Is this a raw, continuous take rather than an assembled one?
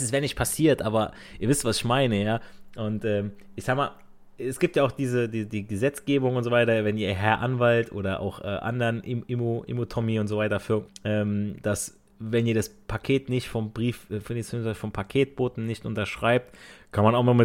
no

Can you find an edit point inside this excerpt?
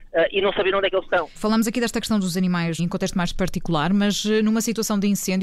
yes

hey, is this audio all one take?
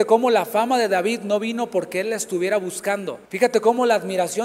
no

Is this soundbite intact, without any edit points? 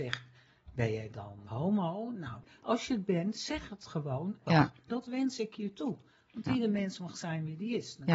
no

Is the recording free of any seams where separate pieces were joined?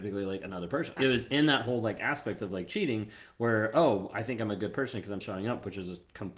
no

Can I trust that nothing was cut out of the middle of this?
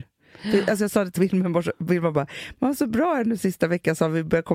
yes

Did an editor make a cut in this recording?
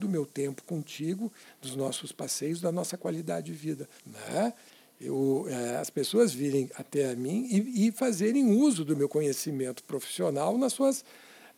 yes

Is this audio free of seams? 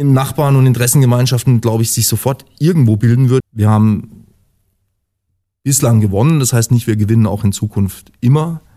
no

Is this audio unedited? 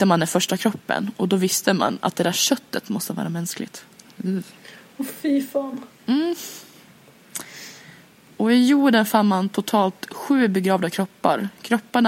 yes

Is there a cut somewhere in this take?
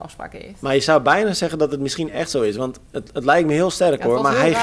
no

